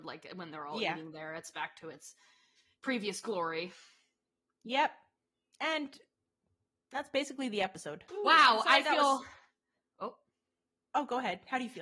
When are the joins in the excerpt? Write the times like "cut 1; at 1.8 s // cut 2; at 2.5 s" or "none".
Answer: cut 1; at 8.1 s